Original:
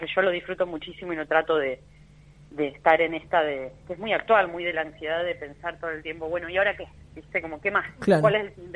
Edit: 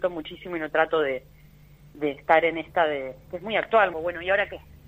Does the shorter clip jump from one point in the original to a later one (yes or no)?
yes